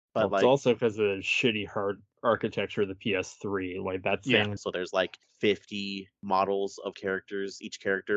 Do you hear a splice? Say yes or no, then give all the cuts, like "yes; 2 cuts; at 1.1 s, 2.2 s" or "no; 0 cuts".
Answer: yes; 2 cuts; at 4.6 s, 6.9 s